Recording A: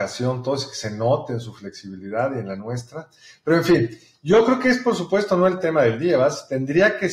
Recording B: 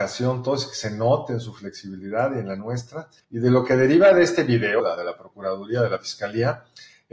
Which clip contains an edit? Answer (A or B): B